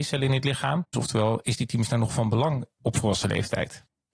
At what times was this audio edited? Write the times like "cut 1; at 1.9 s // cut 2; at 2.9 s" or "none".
cut 1; at 0.9 s